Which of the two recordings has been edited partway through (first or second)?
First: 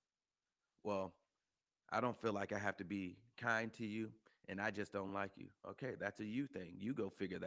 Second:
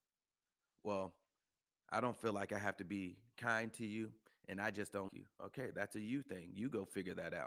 second